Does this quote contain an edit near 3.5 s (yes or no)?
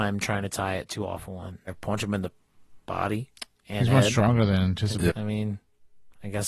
no